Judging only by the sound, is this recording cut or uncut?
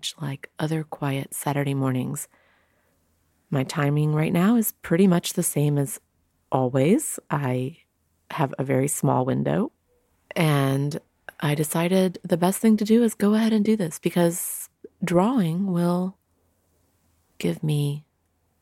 uncut